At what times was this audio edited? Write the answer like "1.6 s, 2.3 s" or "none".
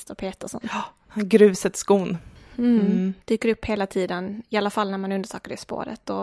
3.2 s